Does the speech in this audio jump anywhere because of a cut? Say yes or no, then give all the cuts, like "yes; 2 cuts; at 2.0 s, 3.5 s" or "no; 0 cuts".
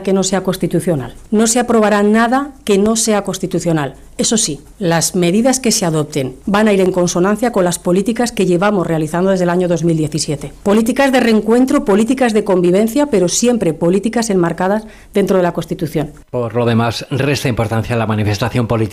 yes; 1 cut; at 1.3 s